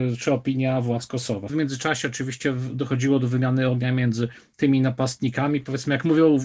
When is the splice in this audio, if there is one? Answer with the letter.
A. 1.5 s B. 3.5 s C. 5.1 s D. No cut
A